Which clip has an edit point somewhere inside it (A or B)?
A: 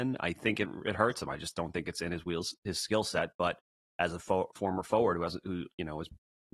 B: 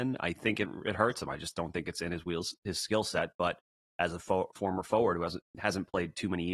B